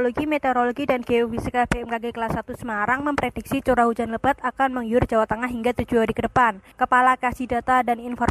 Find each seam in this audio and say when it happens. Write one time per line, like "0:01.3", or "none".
none